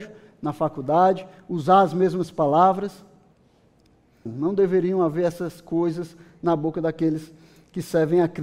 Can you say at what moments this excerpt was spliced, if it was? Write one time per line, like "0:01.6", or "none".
0:04.3